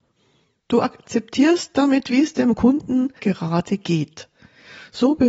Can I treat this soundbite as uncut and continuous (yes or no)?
no